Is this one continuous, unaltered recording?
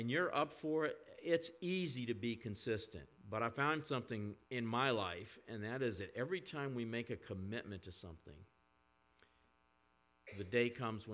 no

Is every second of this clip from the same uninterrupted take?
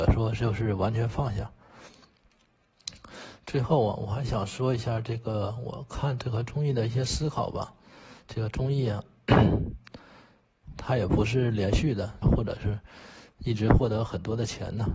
no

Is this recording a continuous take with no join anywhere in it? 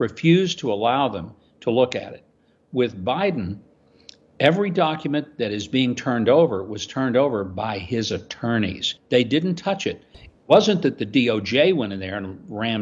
no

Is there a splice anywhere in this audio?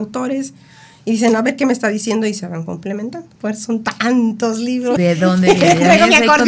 yes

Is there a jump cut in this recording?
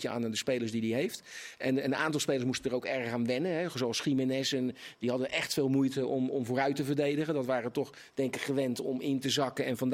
no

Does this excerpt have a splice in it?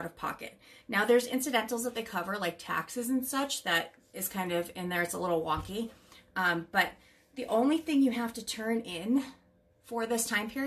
no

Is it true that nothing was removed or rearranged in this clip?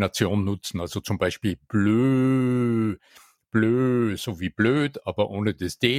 yes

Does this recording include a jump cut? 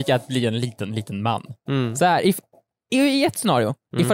no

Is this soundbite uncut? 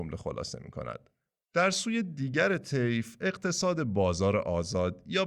no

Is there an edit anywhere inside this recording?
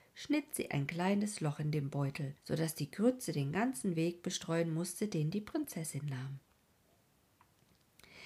yes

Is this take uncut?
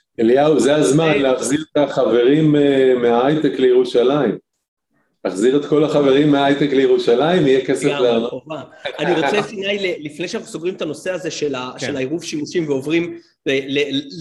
yes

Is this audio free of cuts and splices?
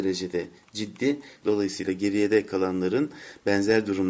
no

